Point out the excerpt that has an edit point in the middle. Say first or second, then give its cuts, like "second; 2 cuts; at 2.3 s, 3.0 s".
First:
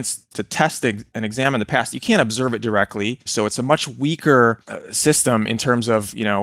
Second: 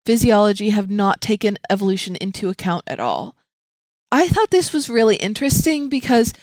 first; 1 cut; at 3.3 s